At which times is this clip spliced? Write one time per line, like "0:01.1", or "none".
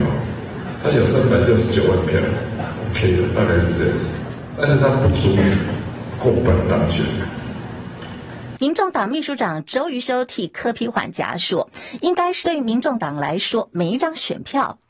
0:08.6
0:12.4